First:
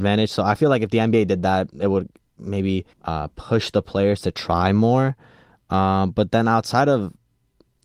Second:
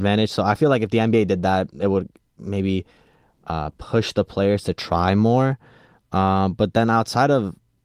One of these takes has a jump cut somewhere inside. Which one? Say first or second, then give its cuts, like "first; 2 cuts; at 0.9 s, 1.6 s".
first; 1 cut; at 2.9 s